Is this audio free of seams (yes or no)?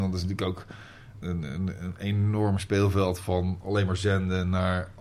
no